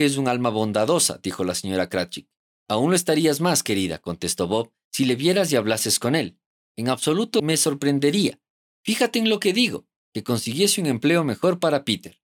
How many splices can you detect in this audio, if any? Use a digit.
0